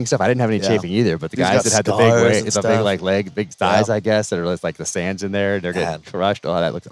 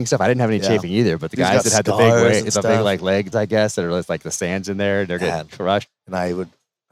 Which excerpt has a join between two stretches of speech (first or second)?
second